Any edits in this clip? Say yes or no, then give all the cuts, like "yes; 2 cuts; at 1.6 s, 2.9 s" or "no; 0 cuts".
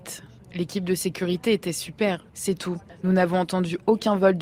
yes; 1 cut; at 2.3 s